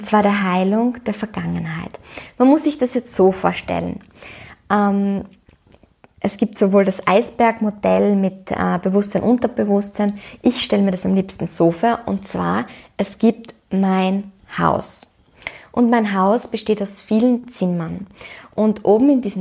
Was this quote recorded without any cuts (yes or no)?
yes